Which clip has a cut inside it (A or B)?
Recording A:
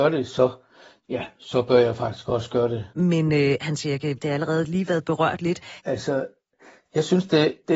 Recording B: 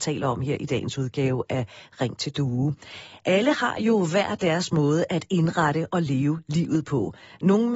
A